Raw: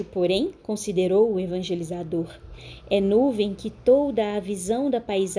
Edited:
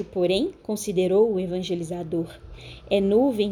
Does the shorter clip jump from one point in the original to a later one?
no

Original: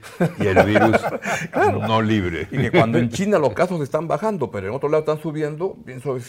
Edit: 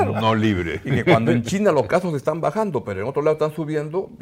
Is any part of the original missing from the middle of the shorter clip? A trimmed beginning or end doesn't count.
no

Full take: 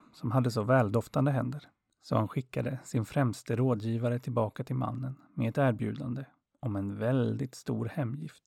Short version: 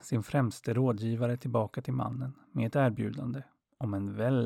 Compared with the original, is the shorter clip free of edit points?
yes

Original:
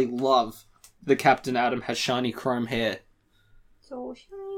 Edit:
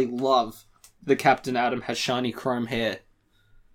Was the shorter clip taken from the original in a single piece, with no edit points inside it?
yes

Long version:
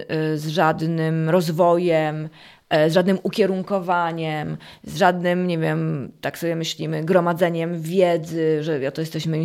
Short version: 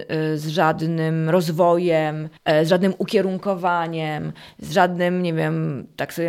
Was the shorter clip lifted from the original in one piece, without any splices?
no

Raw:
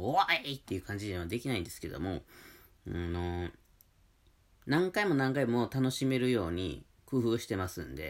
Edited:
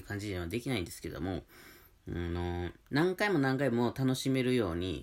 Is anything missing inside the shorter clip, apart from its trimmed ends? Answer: yes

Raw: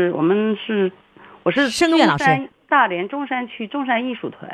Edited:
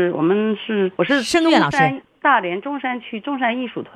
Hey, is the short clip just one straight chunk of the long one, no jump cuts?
no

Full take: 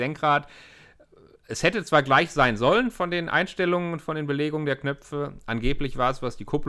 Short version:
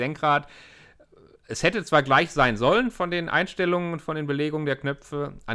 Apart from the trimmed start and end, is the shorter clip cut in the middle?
no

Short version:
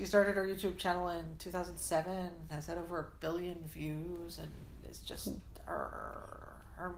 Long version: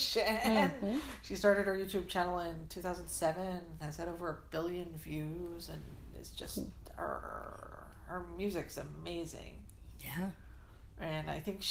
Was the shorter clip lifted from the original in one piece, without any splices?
yes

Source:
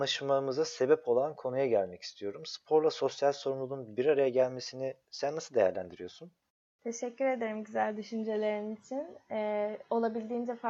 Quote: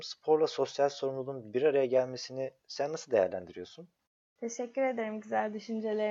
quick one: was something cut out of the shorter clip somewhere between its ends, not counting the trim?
no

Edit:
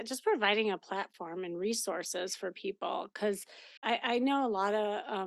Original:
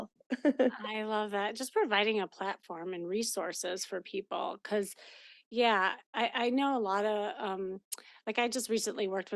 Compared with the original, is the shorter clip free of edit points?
no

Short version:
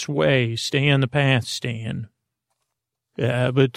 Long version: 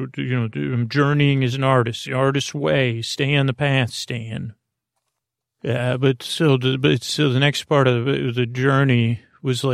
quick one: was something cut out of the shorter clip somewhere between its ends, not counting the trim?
no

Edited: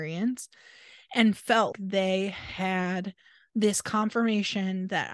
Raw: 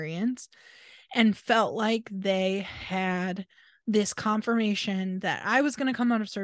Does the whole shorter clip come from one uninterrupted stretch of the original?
no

